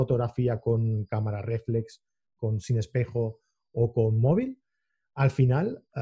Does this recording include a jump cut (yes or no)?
yes